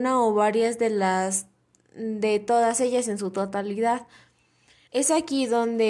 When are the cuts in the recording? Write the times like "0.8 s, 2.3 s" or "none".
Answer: 4.9 s